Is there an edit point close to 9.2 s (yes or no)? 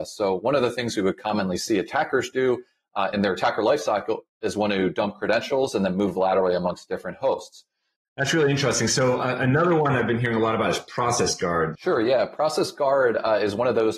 no